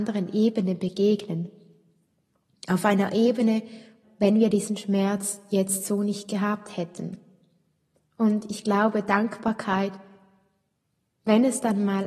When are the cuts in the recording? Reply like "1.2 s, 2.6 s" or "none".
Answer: 4.0 s